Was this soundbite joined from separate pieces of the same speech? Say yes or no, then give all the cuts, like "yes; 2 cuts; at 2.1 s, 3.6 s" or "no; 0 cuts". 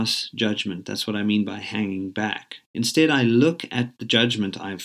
no; 0 cuts